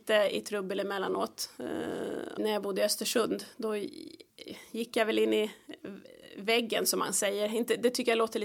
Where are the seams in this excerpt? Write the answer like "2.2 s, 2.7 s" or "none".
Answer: 2.4 s